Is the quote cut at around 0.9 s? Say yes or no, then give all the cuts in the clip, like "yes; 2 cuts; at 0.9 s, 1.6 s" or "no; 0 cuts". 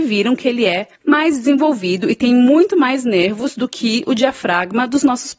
yes; 1 cut; at 0.9 s